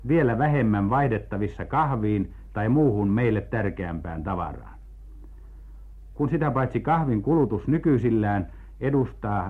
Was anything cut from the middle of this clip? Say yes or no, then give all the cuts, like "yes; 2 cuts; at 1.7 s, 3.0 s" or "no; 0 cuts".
no; 0 cuts